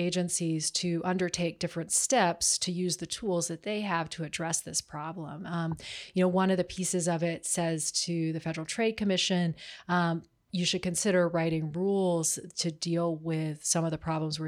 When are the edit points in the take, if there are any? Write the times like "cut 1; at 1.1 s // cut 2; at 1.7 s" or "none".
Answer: none